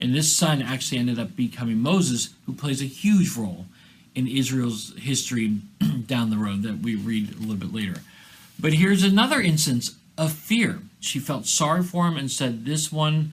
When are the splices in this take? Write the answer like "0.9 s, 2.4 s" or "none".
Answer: 11.0 s